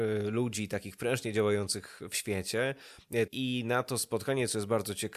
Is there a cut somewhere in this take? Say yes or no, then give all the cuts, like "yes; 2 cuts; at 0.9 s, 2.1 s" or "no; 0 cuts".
yes; 1 cut; at 3.3 s